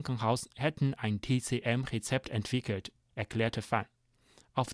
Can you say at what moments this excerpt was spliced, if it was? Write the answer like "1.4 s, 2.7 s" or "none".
none